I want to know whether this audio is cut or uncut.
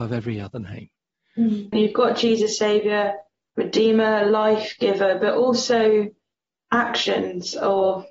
cut